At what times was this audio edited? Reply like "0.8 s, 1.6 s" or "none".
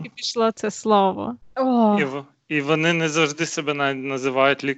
1.5 s